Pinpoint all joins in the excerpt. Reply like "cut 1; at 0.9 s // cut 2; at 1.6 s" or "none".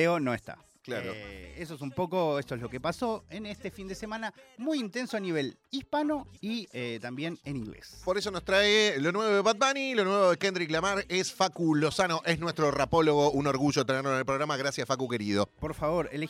cut 1; at 6.4 s